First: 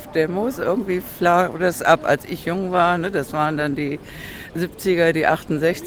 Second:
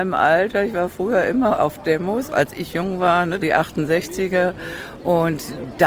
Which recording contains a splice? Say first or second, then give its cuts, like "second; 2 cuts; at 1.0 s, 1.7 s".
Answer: second; 2 cuts; at 2.3 s, 3.4 s